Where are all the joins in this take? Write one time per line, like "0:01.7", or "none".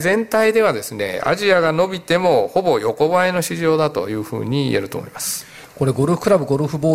none